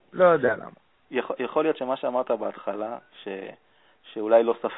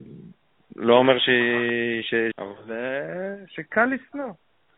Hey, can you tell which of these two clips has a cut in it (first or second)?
second